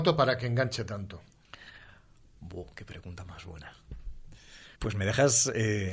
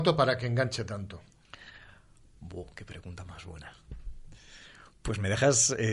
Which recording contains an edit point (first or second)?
first